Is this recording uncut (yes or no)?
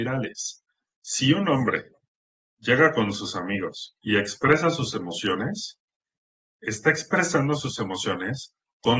no